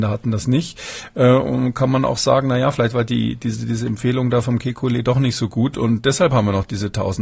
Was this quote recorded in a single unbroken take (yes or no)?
yes